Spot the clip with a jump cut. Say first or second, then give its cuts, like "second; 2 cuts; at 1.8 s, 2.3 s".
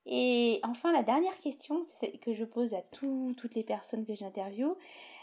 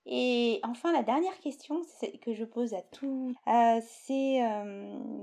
second; 1 cut; at 3.4 s